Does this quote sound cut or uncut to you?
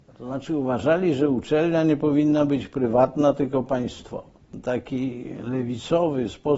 uncut